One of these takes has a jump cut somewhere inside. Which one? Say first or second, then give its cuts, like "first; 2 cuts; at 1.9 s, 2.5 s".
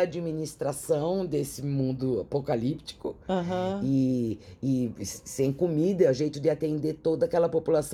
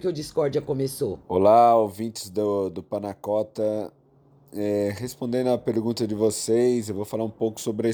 second; 1 cut; at 1.2 s